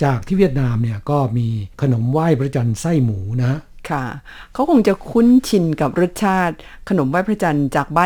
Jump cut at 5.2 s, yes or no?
no